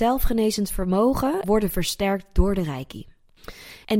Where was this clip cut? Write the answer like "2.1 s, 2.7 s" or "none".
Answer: 1.4 s